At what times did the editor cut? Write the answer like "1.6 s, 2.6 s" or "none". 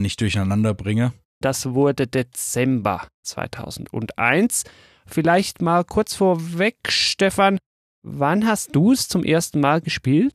1.4 s